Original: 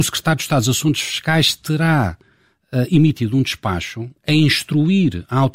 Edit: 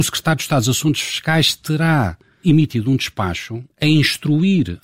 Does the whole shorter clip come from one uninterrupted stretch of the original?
no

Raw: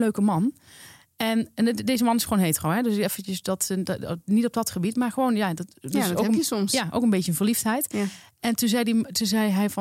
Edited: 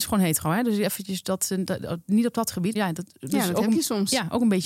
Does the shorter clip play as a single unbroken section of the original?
no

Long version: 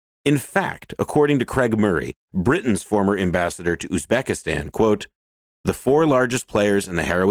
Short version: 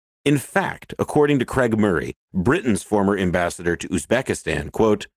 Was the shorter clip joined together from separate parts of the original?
no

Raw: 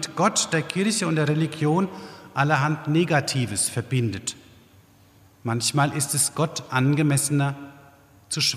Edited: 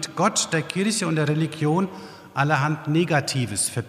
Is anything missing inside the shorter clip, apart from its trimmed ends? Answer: no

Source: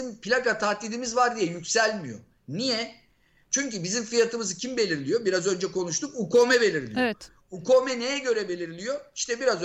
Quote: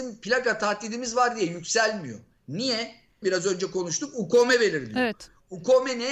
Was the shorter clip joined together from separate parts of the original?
yes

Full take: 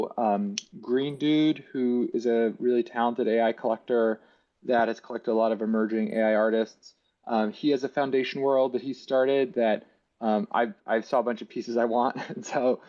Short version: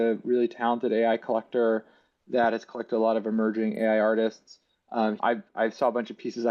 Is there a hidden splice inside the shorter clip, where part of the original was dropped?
yes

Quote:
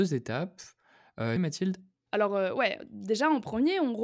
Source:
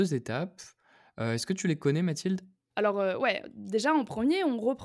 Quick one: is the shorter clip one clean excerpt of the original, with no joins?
no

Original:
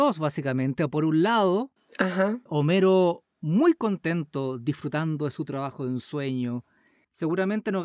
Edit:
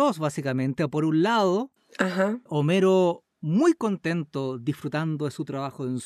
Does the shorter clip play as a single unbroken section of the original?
yes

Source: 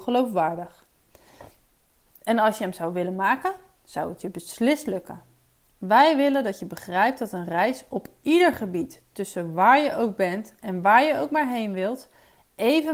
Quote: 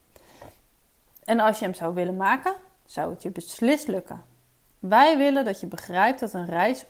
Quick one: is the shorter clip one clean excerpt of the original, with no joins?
yes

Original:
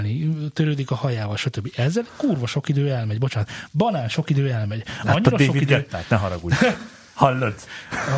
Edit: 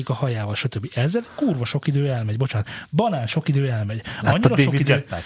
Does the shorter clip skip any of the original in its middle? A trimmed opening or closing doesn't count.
no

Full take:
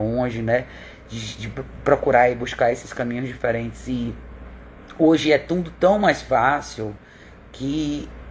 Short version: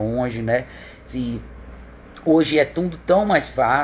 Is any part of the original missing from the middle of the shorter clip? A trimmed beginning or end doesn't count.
yes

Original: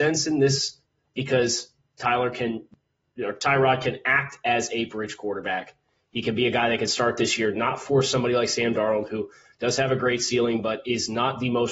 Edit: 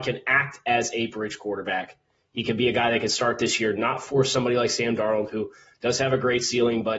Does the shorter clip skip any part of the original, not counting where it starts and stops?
no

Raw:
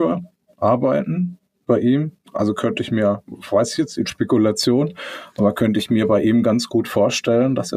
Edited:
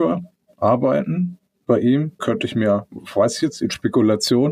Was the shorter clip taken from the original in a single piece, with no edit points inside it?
no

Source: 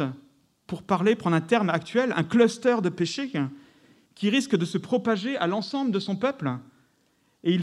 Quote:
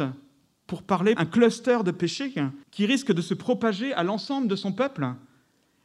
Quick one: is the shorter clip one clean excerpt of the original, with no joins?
no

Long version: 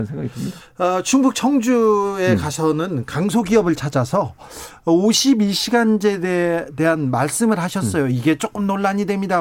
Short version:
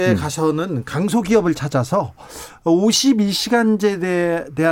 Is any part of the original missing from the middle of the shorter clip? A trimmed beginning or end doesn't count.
no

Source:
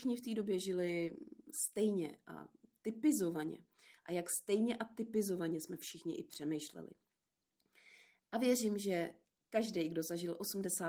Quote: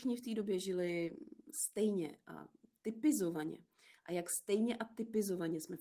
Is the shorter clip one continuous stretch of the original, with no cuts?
yes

